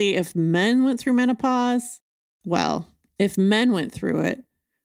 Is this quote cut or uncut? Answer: uncut